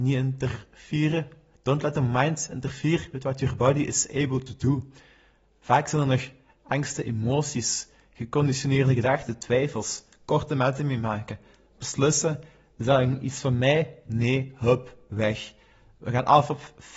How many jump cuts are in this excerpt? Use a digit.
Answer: 0